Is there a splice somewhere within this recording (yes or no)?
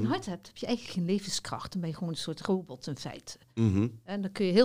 no